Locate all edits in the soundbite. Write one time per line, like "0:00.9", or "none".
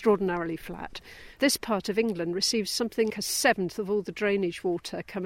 0:01.3
0:03.1